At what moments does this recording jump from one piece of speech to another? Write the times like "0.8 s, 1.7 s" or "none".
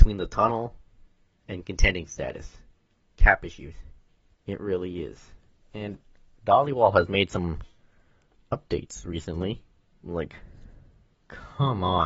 4.3 s, 9.9 s